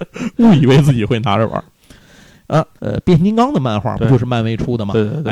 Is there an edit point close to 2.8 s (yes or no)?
yes